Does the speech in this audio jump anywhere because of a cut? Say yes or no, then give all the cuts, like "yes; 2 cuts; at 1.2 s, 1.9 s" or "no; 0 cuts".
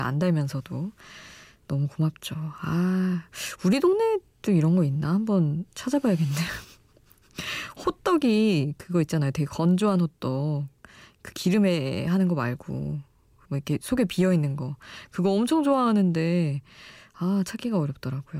no; 0 cuts